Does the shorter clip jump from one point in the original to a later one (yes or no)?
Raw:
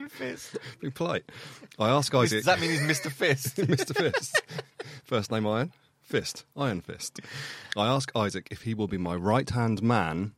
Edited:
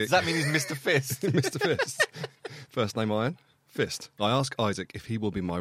yes